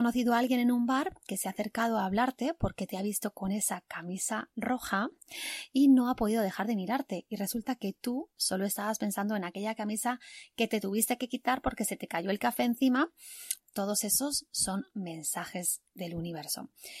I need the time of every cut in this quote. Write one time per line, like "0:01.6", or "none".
0:13.6